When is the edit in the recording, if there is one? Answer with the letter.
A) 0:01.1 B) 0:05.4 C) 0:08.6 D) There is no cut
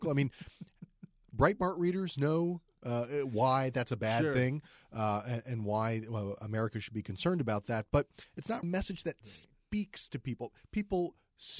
C